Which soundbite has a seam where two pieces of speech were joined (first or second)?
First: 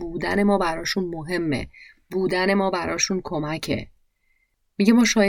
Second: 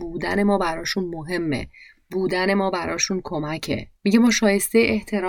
second